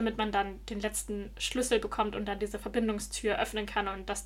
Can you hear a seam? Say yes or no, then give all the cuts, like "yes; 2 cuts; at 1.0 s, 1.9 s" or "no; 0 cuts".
no; 0 cuts